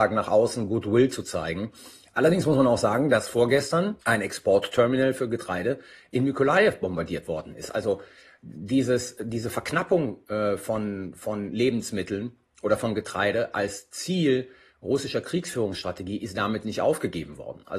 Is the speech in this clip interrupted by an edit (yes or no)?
no